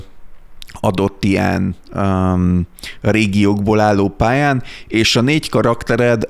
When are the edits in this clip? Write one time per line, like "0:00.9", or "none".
none